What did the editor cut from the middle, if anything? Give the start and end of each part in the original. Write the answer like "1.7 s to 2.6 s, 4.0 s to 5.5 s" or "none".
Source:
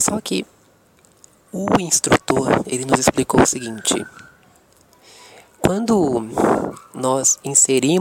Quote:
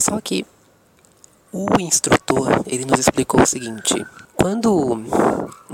4.3 s to 5.5 s